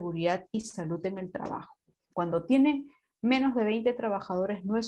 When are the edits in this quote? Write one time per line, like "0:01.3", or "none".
0:02.1